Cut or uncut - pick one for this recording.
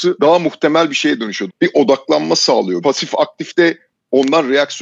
cut